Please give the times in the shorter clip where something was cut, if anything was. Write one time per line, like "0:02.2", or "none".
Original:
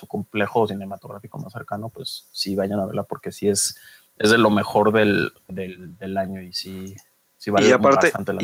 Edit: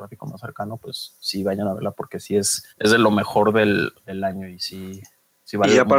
0:02.7
0:04.0